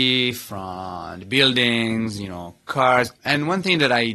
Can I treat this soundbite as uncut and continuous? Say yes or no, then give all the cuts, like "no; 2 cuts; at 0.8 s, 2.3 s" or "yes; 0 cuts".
no; 1 cut; at 3.1 s